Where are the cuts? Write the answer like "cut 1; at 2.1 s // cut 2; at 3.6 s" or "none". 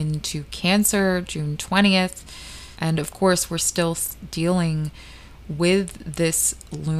cut 1; at 2.7 s